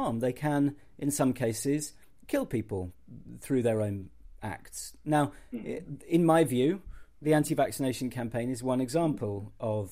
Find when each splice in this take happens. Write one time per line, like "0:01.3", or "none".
none